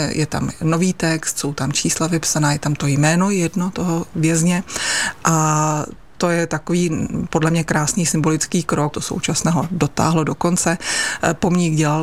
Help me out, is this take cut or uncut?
cut